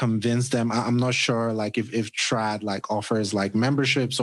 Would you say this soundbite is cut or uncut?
uncut